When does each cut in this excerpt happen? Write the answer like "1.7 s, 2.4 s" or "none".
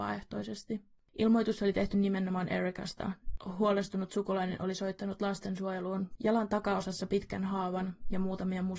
1.1 s, 6.2 s